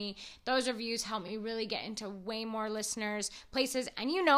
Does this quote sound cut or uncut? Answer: uncut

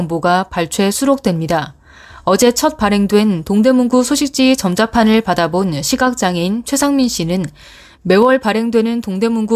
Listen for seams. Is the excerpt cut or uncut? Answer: uncut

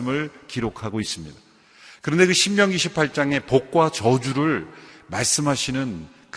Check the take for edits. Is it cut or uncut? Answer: uncut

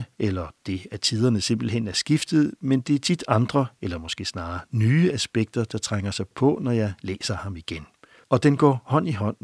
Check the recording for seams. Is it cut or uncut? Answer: cut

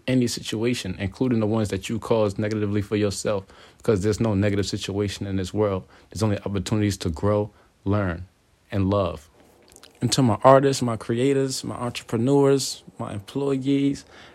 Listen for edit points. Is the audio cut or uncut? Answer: uncut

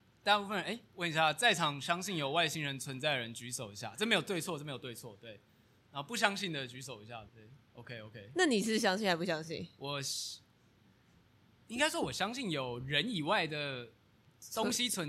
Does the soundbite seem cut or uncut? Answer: cut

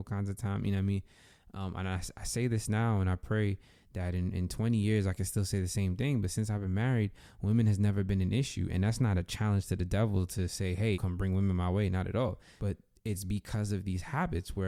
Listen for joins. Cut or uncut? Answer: cut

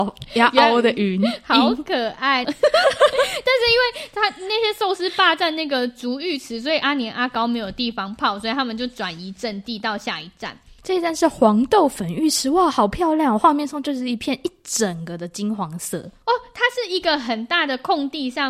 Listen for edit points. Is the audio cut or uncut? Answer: cut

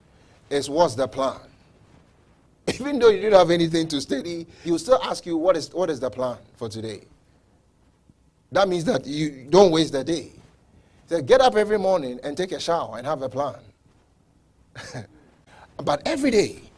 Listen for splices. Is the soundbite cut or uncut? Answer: cut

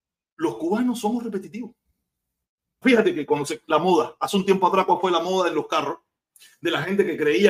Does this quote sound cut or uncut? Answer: cut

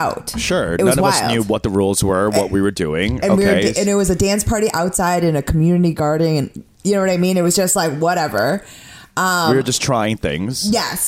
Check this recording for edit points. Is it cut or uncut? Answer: uncut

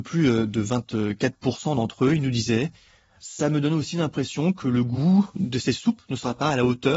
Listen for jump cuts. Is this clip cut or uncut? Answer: uncut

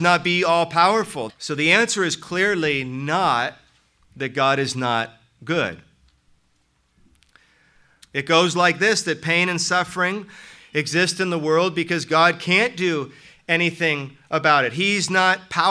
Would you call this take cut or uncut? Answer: cut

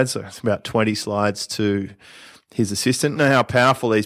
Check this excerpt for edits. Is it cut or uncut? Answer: cut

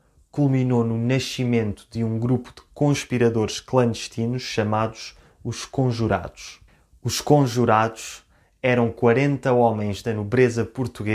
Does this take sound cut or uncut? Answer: uncut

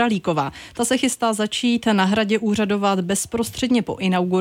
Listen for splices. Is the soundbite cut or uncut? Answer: uncut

